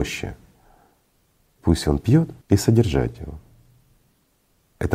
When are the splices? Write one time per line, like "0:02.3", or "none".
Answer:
0:02.4